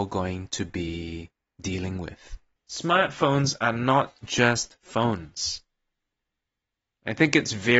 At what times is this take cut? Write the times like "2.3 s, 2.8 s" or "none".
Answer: 2.6 s